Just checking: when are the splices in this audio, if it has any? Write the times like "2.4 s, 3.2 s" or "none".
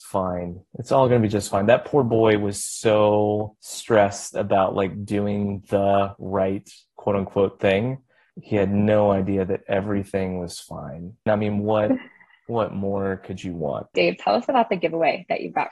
11.3 s, 13.9 s